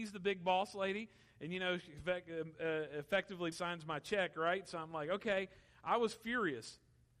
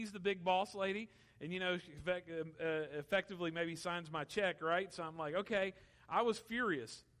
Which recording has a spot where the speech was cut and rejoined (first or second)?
first